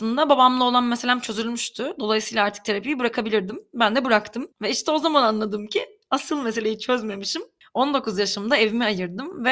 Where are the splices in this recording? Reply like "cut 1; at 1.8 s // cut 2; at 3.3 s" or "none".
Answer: cut 1; at 4.5 s // cut 2; at 7.6 s